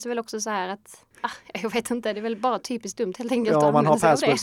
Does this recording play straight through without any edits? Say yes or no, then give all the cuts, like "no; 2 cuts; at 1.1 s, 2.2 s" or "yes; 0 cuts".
no; 1 cut; at 1.1 s